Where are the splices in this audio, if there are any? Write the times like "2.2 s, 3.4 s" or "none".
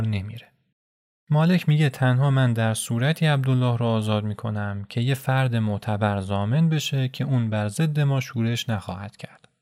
none